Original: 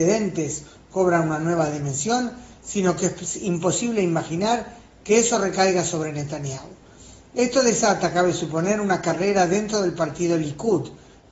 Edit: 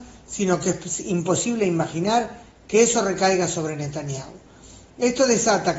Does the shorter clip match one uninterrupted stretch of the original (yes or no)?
yes